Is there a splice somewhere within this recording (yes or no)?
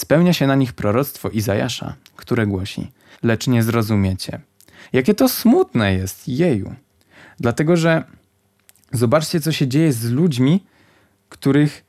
yes